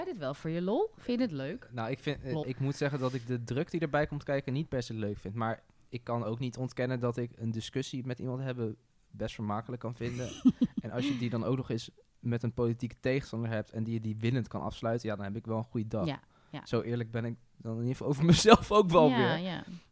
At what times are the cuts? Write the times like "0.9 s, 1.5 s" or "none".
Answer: 2.4 s